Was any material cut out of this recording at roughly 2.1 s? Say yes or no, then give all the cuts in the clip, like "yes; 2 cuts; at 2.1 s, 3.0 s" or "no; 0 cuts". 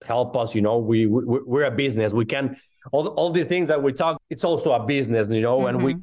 no; 1 cut; at 4.2 s